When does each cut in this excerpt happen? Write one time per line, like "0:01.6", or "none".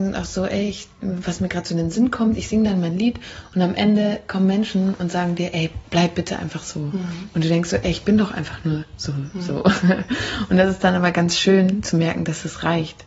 0:05.9

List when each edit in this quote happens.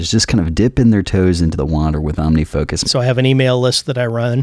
0:02.8

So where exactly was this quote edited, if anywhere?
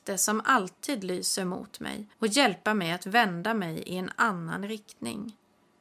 0:02.1

